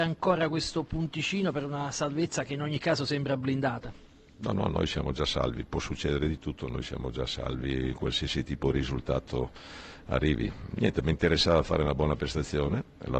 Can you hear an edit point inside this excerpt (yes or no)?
no